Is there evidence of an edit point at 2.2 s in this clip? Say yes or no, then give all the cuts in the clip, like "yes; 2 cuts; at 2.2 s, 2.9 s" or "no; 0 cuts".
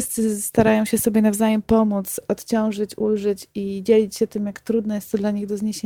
no; 0 cuts